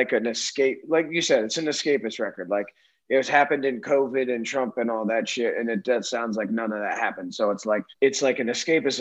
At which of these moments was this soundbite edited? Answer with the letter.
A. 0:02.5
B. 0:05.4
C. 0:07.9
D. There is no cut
C